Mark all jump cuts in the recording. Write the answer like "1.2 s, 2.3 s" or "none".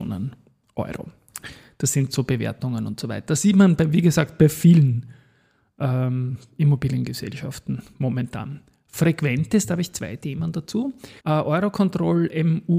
11.2 s